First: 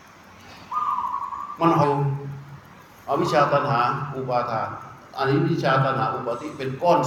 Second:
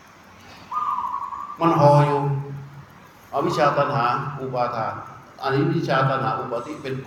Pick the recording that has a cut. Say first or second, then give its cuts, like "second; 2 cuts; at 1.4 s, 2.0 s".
first; 1 cut; at 1.8 s